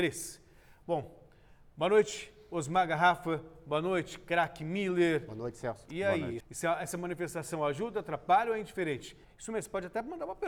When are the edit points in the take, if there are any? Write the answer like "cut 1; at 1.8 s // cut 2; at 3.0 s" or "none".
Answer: cut 1; at 6.4 s // cut 2; at 9.2 s